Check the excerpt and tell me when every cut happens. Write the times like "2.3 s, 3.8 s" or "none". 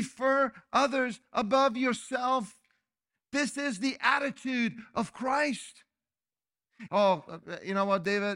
6.9 s